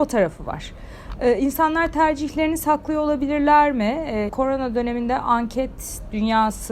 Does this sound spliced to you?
yes; 1 cut; at 4.3 s

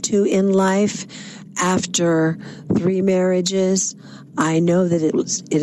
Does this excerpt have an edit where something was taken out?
yes; 1 cut; at 4.3 s

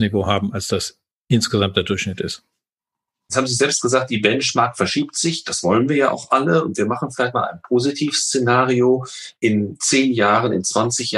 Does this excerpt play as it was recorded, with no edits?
yes; 0 cuts

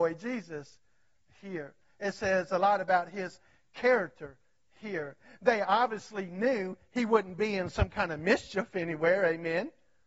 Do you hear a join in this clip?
no; 0 cuts

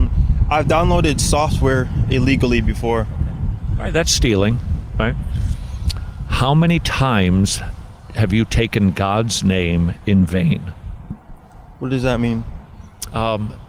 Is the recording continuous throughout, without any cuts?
yes; 0 cuts

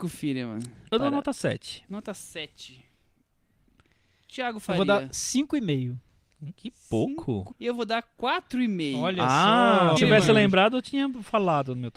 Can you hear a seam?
yes; 2 cuts; at 7.5 s, 10.0 s

